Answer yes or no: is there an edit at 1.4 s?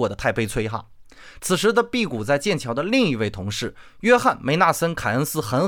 yes